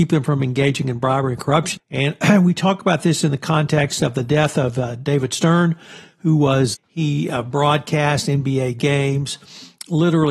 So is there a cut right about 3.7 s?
no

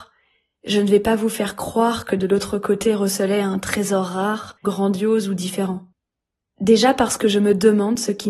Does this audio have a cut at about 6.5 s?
no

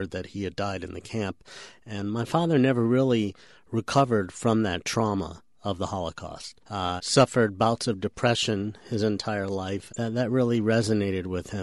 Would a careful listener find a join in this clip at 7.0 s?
yes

